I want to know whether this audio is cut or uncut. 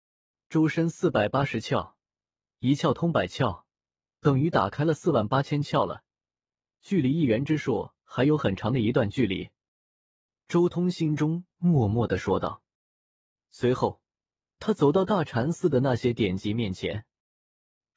uncut